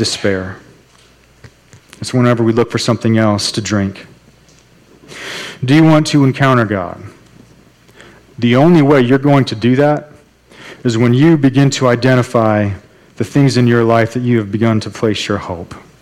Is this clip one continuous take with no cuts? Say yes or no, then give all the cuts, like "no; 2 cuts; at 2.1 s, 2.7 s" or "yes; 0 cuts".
yes; 0 cuts